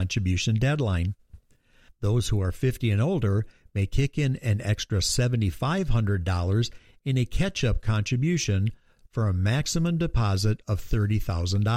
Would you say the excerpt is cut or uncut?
cut